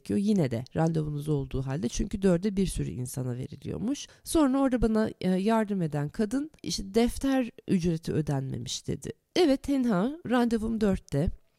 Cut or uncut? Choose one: cut